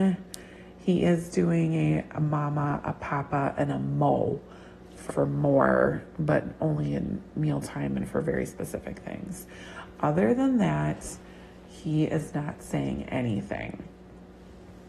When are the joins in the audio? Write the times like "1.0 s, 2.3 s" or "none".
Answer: 5.1 s